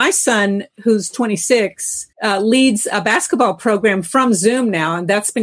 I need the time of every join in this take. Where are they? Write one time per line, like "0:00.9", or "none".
0:02.1